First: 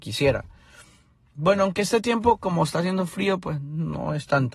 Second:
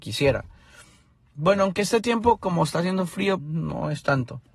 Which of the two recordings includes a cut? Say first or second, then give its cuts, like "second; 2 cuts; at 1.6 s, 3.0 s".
second; 1 cut; at 3.4 s